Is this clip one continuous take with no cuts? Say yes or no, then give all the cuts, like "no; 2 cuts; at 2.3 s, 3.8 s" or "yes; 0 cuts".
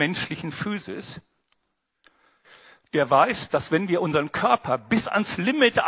yes; 0 cuts